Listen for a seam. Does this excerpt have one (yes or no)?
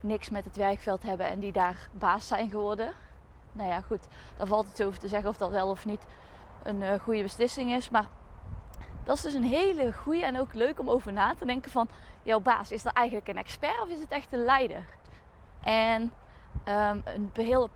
yes